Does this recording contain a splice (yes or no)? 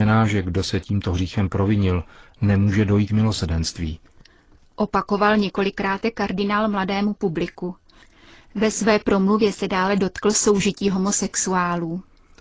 no